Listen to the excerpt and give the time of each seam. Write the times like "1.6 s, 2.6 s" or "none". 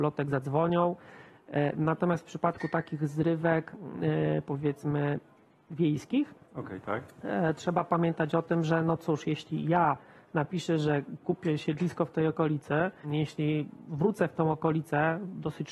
13.0 s